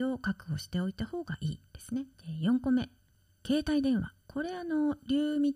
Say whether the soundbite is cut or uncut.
cut